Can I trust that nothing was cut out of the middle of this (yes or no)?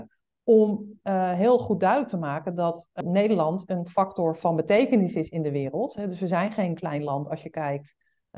yes